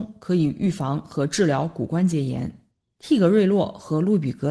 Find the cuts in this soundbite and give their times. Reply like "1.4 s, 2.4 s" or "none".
none